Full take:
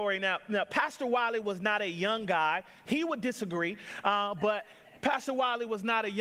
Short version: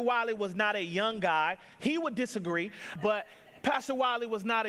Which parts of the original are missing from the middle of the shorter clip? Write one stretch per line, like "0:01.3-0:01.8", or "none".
0:04.0-0:04.3